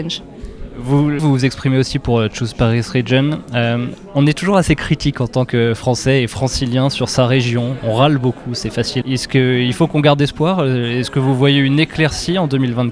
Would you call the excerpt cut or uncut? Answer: cut